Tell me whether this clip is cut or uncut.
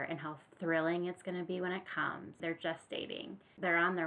cut